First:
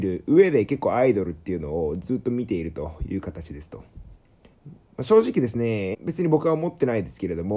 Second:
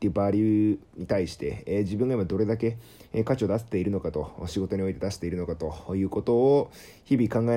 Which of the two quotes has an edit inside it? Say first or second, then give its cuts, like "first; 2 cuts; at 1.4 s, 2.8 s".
first; 2 cuts; at 4.5 s, 5.9 s